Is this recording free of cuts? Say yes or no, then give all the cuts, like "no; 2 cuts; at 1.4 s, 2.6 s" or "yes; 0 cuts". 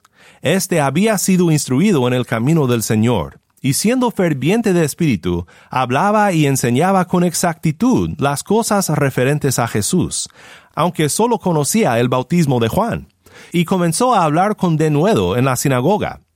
yes; 0 cuts